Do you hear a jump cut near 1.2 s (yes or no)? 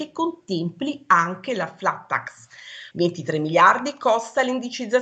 no